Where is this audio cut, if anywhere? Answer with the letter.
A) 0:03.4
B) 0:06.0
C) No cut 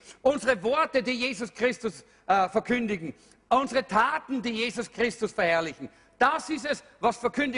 C